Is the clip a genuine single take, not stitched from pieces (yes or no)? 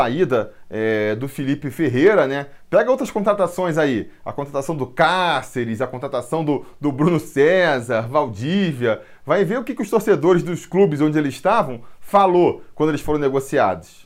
yes